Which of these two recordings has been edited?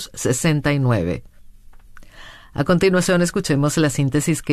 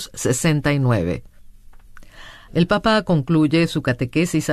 second; 1 cut; at 2.5 s

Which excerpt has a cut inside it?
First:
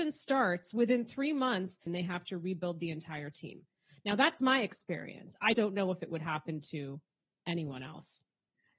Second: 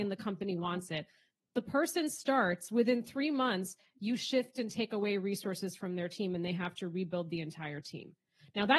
first; 2 cuts; at 1.9 s, 5.5 s

